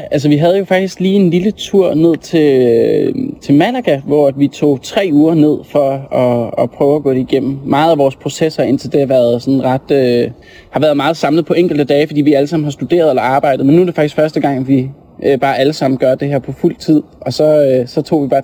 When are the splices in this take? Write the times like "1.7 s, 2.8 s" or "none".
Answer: none